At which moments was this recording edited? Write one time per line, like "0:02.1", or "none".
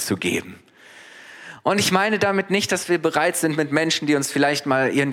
none